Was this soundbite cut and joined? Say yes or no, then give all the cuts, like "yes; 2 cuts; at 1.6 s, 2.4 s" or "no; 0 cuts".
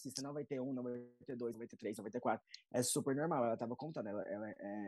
no; 0 cuts